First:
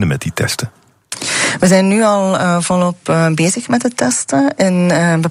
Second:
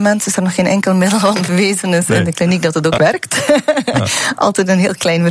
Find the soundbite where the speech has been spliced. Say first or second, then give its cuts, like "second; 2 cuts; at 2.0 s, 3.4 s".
second; 1 cut; at 3.0 s